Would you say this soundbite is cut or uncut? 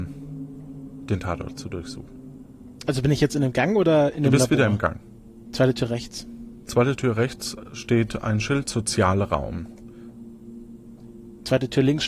cut